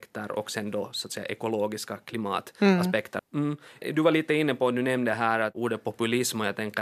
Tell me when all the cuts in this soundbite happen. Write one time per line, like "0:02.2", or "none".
0:03.2